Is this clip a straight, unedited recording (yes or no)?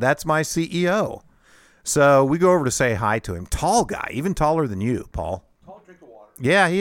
yes